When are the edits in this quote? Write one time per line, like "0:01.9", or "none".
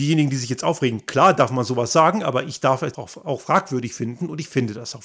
0:02.9